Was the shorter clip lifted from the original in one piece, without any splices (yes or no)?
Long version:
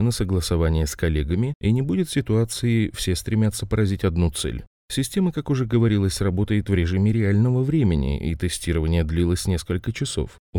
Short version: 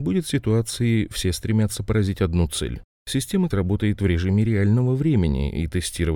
no